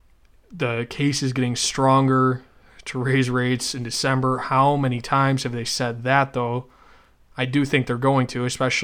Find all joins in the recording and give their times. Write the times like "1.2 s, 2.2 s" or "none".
none